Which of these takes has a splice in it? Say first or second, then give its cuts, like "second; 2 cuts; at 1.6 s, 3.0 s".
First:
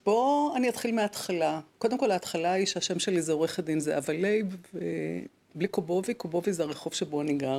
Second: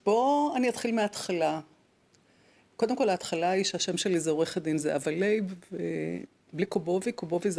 first; 1 cut; at 1.7 s